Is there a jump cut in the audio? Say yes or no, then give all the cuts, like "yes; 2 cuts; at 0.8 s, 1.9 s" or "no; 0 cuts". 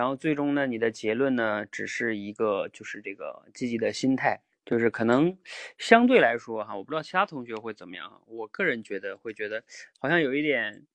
yes; 1 cut; at 4.5 s